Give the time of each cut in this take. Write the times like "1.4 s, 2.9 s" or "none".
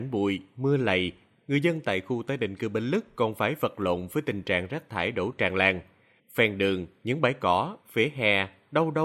6.2 s, 7.8 s